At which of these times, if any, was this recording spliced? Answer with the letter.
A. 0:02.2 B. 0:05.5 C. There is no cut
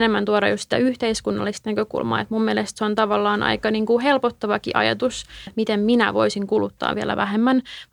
B